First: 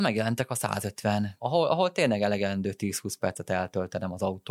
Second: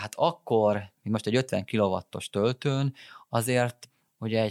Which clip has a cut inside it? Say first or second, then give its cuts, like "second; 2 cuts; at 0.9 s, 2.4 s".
first; 1 cut; at 1.4 s